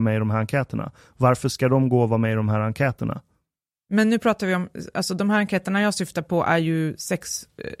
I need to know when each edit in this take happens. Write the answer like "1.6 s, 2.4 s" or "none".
none